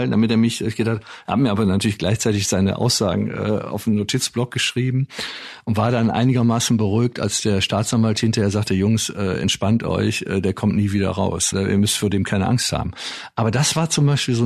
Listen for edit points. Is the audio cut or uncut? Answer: cut